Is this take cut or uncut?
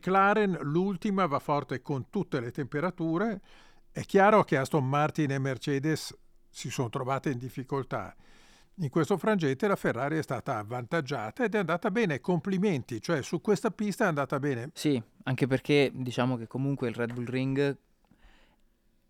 cut